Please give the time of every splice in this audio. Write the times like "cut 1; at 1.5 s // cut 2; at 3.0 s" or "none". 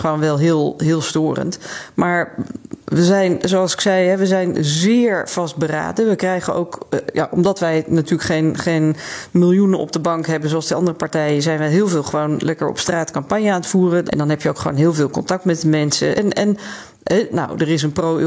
cut 1; at 14.0 s // cut 2; at 16.1 s // cut 3; at 17.3 s